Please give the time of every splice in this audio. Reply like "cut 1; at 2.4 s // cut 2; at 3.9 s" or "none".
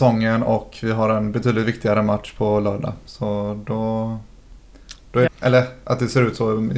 cut 1; at 5.3 s